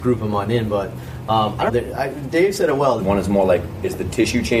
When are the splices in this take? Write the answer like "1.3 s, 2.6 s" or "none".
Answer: 1.7 s, 3.0 s